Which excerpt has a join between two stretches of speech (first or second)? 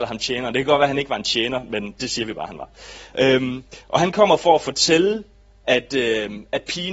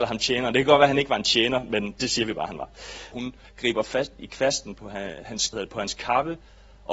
second